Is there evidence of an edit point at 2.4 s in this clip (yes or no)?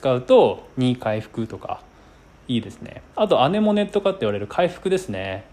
no